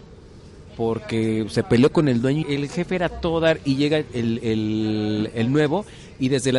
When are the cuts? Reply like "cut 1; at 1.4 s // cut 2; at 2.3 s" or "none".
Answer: cut 1; at 2.4 s